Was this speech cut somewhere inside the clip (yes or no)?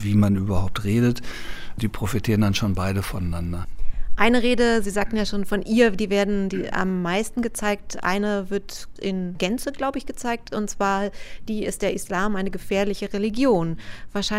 no